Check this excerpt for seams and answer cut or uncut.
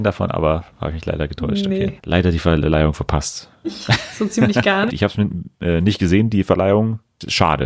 cut